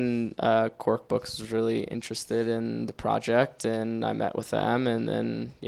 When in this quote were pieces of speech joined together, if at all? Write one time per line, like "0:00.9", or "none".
none